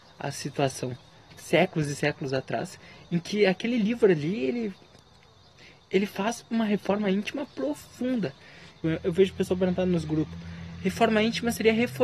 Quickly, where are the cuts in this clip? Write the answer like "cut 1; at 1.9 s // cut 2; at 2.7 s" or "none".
cut 1; at 1.3 s // cut 2; at 8.8 s